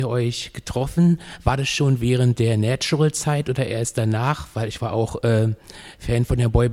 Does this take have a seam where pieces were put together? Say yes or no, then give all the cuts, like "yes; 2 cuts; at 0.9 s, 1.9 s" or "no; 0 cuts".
no; 0 cuts